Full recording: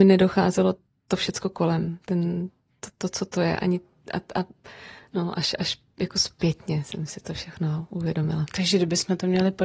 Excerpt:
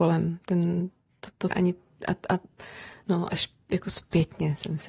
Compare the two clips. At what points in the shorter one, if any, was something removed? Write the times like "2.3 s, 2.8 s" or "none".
1.5 s, 3.3 s